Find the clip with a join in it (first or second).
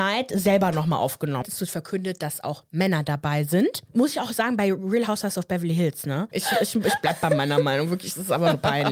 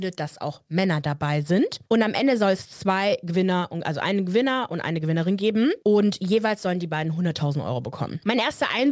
first